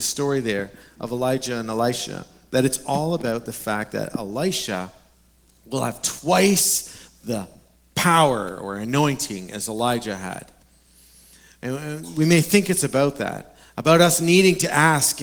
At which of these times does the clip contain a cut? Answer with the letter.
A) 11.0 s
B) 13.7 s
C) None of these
C